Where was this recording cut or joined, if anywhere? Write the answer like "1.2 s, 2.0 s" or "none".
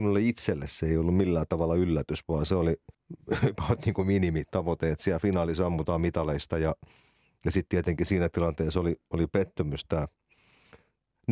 2.9 s